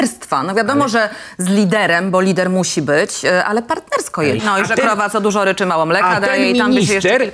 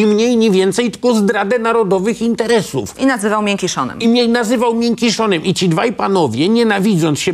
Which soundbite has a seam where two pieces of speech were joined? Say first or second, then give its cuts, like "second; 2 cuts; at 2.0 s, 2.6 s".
first; 1 cut; at 4.4 s